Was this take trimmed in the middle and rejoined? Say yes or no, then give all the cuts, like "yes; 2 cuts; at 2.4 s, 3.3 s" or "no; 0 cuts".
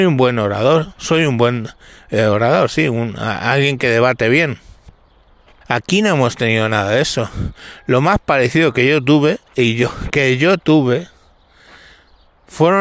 yes; 1 cut; at 5.6 s